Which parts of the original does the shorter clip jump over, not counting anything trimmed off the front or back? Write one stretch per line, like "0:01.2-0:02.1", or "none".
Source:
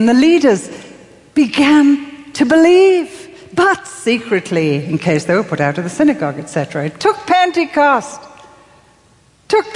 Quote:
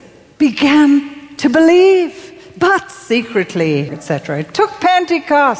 0:04.8-0:06.3